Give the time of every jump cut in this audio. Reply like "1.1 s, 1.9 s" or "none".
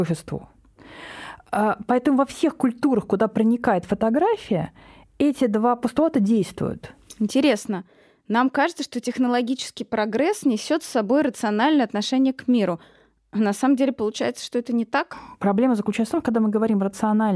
none